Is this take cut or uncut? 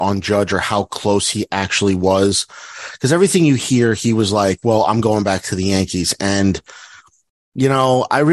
uncut